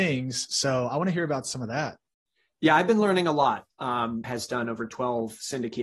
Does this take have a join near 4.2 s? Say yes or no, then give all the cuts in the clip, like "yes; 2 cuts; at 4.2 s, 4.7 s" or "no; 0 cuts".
yes; 1 cut; at 4.2 s